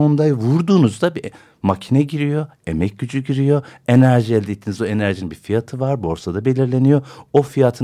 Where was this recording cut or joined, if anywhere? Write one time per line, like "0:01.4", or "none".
none